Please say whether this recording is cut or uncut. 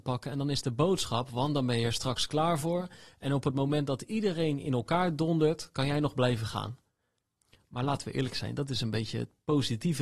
uncut